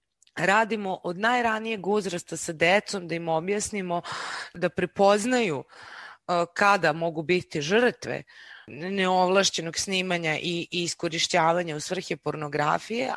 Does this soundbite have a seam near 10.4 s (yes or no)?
no